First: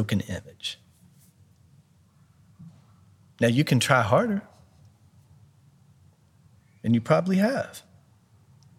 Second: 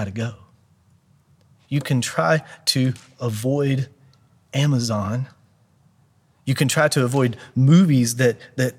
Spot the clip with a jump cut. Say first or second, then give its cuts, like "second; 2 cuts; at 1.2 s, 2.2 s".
second; 1 cut; at 1.6 s